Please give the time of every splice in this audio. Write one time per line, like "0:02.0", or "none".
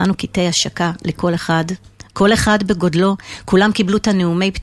0:02.1